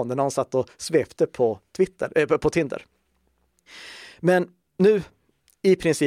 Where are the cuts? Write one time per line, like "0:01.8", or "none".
none